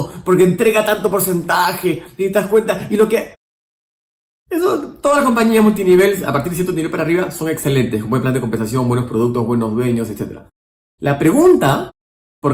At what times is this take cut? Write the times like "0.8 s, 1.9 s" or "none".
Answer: none